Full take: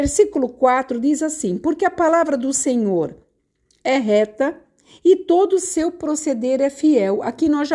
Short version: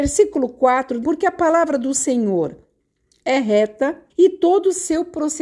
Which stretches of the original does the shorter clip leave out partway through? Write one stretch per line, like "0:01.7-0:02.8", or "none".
0:01.0-0:01.6
0:04.7-0:05.0